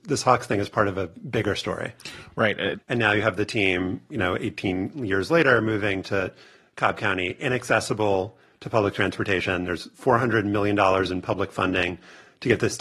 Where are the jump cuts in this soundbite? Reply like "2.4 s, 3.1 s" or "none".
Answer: 2.7 s